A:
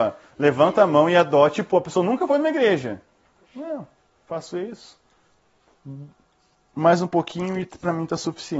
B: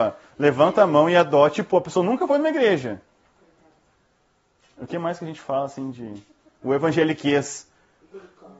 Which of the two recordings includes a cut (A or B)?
A